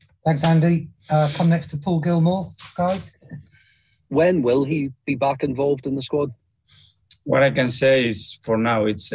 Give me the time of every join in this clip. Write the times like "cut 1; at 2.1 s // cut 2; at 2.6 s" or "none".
cut 1; at 4.1 s